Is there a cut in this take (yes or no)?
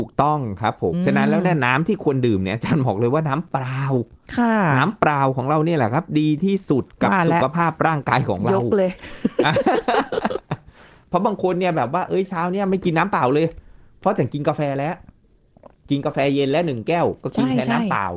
yes